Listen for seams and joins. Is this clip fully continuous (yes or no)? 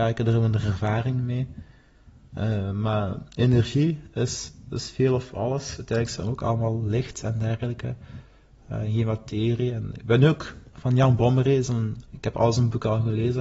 yes